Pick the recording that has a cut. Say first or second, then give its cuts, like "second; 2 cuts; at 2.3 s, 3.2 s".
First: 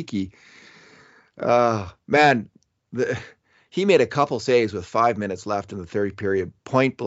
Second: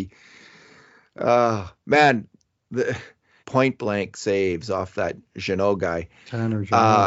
second; 1 cut; at 3.4 s